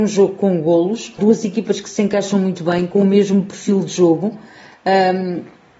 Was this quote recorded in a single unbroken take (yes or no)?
no